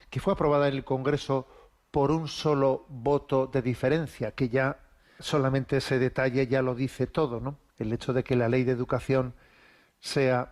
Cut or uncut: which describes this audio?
cut